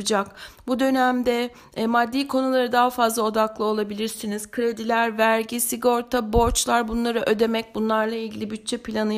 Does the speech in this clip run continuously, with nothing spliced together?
yes; 0 cuts

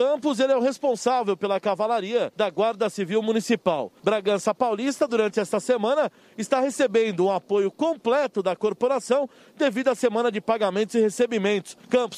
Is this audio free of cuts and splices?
yes; 0 cuts

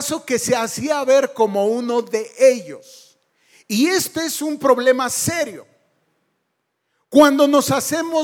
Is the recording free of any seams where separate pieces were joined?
yes; 0 cuts

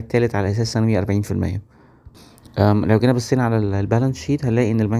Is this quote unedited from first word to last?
yes; 0 cuts

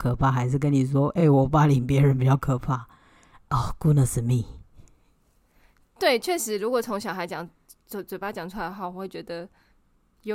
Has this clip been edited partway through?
no; 0 cuts

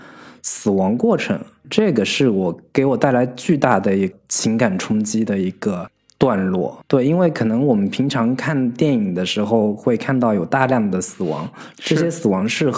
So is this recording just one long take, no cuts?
yes; 0 cuts

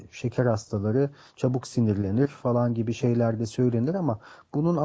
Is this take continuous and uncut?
yes; 0 cuts

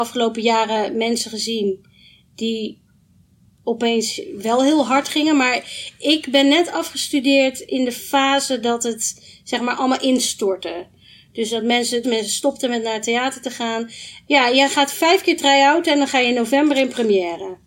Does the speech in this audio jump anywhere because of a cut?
yes; 2 cuts; at 12.0 s, 14.2 s

